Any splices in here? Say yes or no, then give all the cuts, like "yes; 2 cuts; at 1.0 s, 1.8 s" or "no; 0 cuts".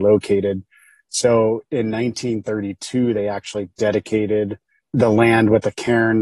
no; 0 cuts